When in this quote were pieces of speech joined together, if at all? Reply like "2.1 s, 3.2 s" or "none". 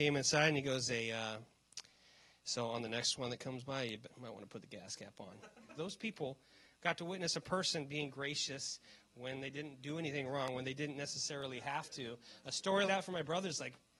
5.8 s, 12.9 s